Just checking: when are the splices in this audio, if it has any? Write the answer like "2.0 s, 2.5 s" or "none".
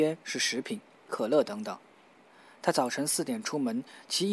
1.1 s